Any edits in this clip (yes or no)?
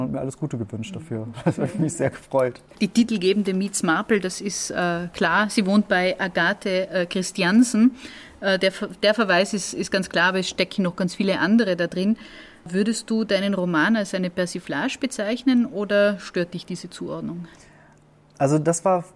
yes